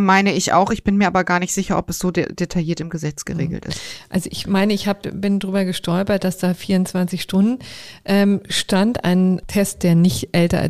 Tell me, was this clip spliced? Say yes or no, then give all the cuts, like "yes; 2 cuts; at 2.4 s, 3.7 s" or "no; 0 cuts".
no; 0 cuts